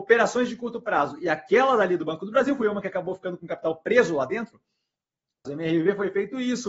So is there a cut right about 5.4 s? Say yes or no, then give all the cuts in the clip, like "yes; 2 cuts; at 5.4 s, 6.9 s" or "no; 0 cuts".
yes; 1 cut; at 5.4 s